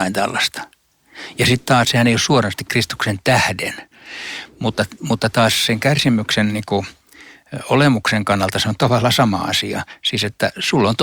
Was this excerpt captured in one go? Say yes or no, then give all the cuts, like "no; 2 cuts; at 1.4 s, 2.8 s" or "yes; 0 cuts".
no; 1 cut; at 1.8 s